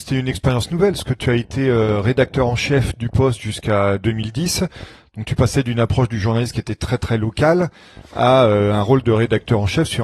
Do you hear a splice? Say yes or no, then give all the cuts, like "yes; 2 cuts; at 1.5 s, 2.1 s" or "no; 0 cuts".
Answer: no; 0 cuts